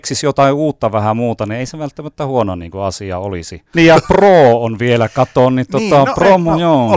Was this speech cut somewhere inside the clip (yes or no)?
yes